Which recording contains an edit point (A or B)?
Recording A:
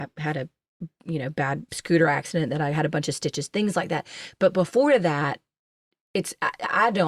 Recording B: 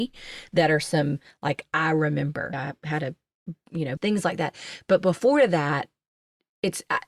B